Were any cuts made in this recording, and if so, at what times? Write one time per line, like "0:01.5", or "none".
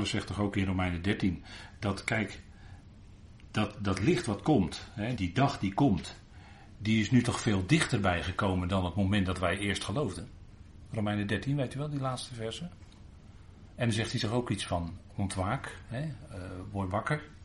0:05.2